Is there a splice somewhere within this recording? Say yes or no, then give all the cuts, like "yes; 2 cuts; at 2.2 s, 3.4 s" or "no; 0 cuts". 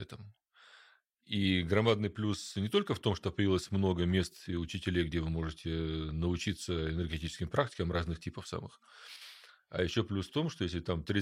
no; 0 cuts